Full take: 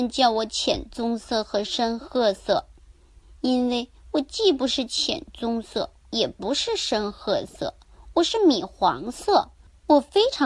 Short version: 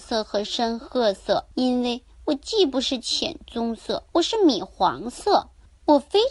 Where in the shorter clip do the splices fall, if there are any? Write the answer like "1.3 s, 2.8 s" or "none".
1.5 s, 4.1 s